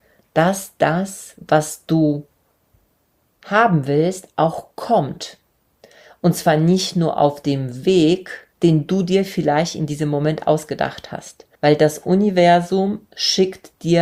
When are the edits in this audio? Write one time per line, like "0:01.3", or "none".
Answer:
0:08.5
0:11.5